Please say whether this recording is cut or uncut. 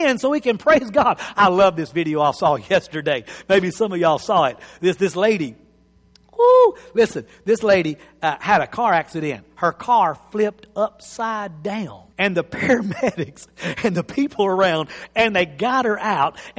cut